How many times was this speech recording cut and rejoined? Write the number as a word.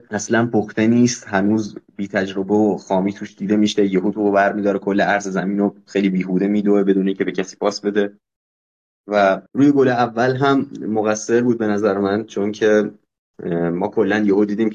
one